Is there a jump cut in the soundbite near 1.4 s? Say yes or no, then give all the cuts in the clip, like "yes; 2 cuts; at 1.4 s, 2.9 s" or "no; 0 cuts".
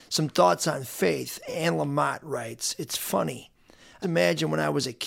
no; 1 cut; at 4.0 s